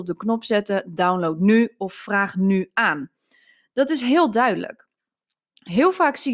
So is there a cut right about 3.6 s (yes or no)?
no